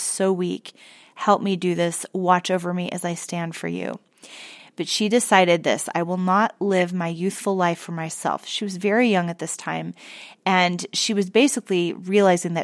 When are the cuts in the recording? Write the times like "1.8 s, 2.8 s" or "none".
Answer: 4.6 s